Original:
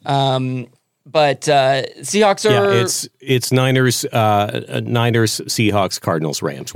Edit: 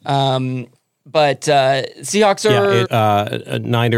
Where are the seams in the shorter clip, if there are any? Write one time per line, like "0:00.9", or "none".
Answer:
0:02.8